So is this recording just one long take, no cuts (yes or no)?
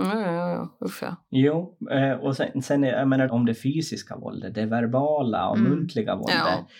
no